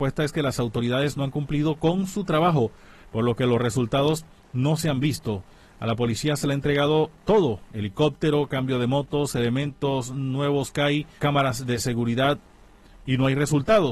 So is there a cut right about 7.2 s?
yes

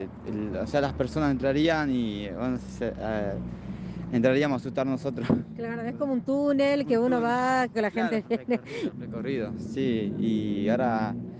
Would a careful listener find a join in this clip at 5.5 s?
no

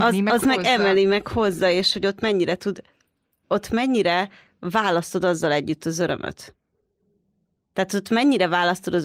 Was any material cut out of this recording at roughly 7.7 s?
no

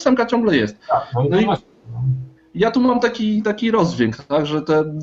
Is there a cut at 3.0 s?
no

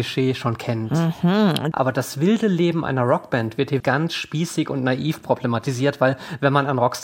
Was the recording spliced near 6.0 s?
no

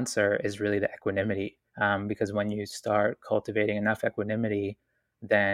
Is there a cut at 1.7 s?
yes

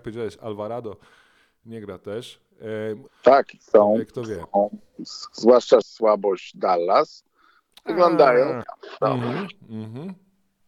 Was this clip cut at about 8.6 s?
yes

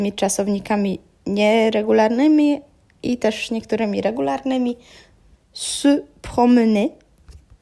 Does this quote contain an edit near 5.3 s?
yes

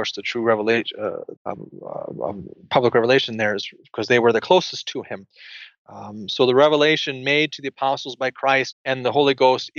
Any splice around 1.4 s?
yes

